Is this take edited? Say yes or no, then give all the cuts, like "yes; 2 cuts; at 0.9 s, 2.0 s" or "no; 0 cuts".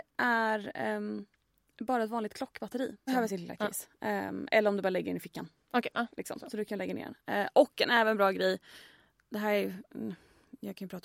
yes; 1 cut; at 3.1 s